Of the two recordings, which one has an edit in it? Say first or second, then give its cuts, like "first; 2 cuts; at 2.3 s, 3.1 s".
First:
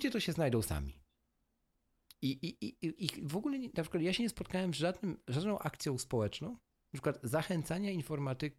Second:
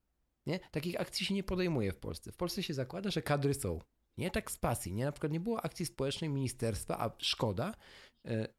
second; 1 cut; at 4.1 s